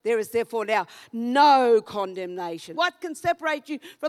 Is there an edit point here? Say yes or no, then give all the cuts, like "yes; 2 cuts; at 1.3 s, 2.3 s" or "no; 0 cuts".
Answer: yes; 1 cut; at 2.7 s